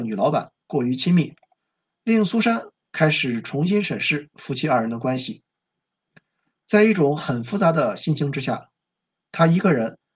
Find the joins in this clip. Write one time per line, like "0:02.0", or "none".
none